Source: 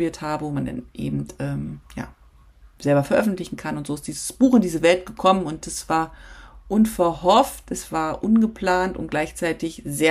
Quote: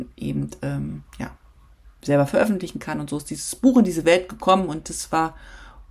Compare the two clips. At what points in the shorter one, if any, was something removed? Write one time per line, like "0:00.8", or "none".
none